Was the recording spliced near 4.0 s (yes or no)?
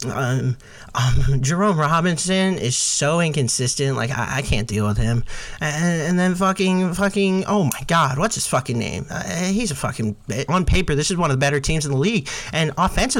no